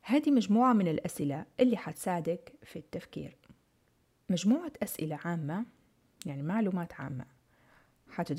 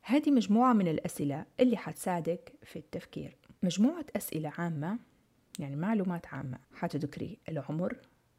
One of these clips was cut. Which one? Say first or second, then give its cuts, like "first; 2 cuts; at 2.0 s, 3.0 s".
second; 2 cuts; at 3.6 s, 6.6 s